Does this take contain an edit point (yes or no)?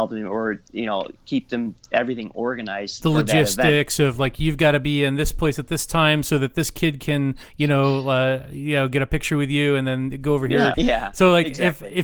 yes